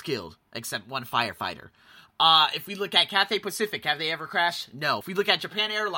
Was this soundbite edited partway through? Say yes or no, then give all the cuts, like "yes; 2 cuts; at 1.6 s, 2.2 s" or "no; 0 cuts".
no; 0 cuts